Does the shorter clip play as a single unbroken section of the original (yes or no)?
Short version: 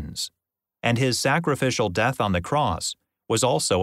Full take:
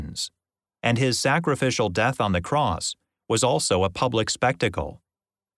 yes